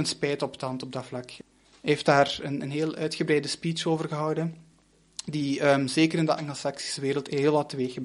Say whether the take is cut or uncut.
uncut